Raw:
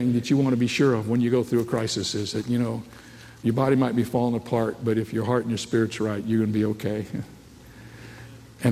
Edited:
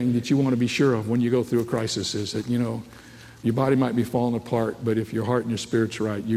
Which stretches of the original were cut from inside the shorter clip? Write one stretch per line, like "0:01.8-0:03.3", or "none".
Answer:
none